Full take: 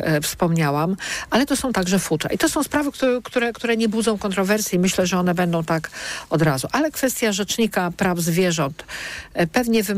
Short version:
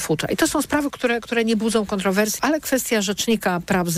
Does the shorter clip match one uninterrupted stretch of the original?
no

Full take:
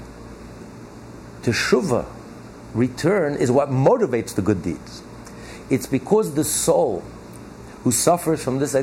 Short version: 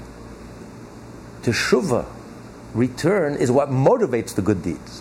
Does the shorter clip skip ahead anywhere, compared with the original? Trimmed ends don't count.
no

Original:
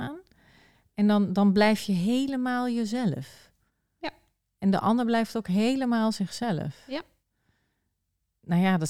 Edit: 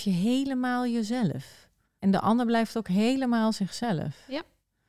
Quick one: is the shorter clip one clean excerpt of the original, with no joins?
no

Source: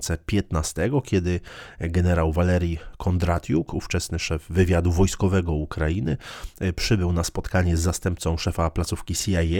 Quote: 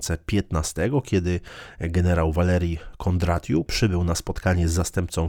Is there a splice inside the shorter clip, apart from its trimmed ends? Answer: yes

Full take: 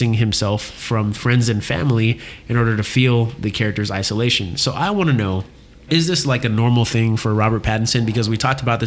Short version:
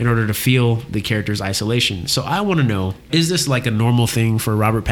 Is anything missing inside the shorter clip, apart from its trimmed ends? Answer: yes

